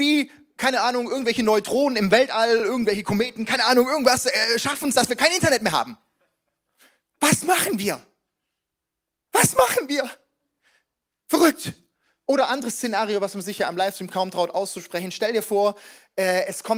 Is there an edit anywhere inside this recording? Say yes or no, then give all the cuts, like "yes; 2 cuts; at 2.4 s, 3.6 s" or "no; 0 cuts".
no; 0 cuts